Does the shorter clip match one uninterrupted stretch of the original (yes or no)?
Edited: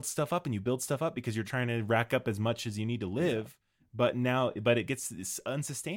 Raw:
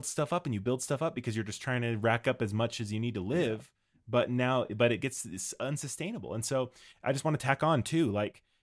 no